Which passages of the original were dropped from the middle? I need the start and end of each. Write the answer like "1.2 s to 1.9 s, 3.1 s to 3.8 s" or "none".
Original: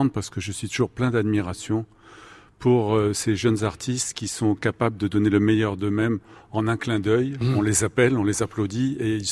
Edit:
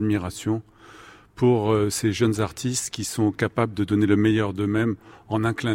none